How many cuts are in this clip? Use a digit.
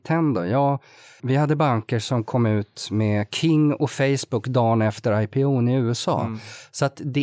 1